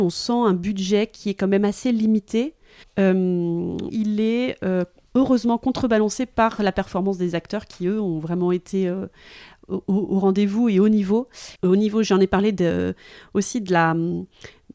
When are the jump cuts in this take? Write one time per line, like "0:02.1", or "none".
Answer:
0:02.8
0:03.9
0:11.6